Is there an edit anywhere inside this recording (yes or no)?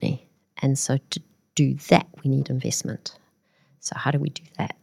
no